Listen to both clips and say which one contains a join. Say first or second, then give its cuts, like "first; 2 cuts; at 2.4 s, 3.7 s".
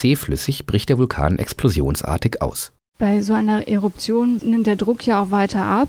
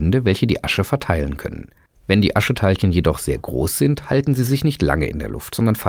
first; 1 cut; at 4.4 s